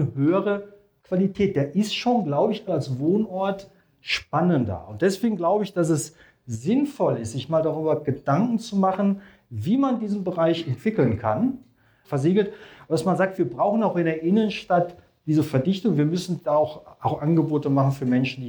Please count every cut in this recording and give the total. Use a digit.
2